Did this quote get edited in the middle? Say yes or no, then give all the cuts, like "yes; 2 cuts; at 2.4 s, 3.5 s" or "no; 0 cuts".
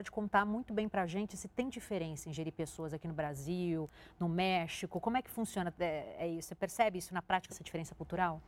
yes; 1 cut; at 7.5 s